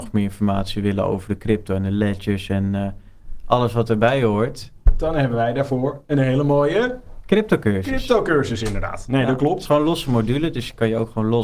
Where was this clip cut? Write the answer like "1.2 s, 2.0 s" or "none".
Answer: none